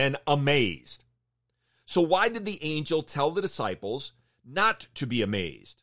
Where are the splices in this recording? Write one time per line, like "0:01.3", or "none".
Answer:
none